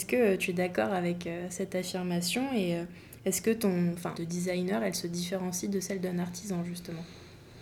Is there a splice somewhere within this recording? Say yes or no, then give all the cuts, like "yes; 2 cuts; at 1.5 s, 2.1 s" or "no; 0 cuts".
yes; 1 cut; at 4.1 s